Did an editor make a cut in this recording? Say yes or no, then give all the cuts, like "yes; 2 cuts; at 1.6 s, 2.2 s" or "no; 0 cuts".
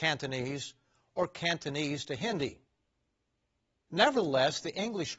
no; 0 cuts